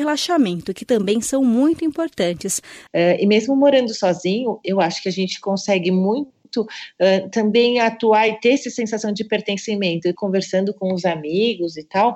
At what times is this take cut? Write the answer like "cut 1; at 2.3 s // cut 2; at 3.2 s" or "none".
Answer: cut 1; at 2.9 s // cut 2; at 10.2 s

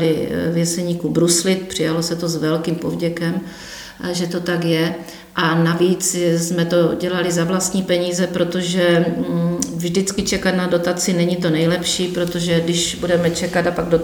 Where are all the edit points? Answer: none

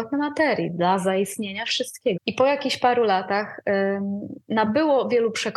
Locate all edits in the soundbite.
cut 1; at 2.2 s

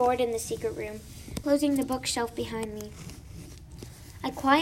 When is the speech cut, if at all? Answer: cut 1; at 1.4 s

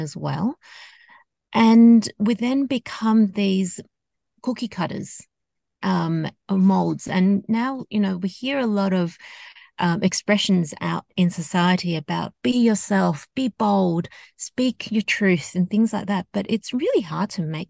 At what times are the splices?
none

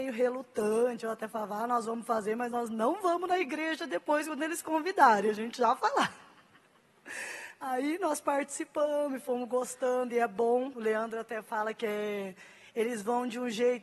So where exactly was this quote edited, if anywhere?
none

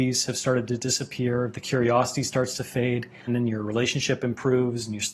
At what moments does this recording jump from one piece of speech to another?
cut 1; at 3.3 s

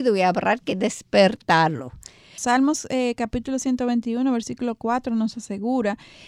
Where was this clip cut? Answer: cut 1; at 2.4 s

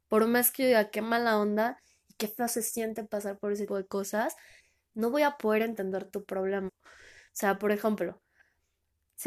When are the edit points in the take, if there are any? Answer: cut 1; at 3.7 s // cut 2; at 6.7 s

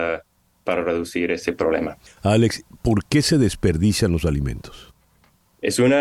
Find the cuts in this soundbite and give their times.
none

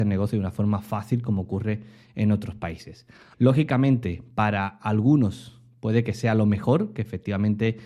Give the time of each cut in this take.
cut 1; at 3.3 s

